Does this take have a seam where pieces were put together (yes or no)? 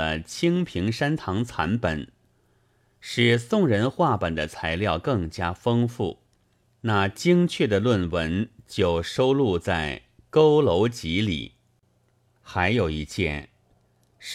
yes